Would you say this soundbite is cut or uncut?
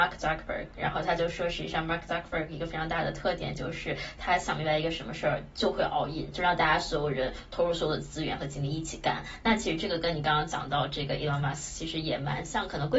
uncut